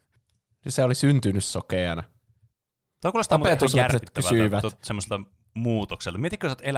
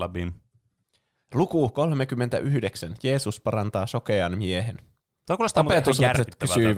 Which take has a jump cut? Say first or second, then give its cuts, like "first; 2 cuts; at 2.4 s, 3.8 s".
second; 1 cut; at 5.1 s